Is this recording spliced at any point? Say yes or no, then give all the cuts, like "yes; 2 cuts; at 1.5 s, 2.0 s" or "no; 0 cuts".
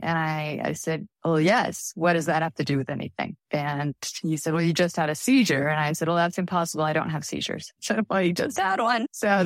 no; 0 cuts